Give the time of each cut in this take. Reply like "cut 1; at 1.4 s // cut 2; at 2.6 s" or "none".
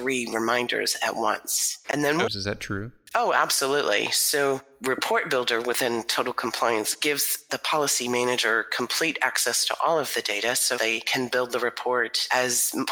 cut 1; at 2.3 s // cut 2; at 10.8 s